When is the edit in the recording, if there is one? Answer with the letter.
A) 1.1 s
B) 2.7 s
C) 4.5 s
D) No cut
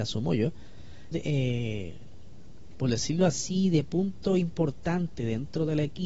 A